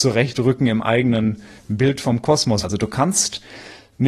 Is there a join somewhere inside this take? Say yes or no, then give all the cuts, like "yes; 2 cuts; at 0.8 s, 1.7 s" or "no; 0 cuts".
yes; 1 cut; at 2.6 s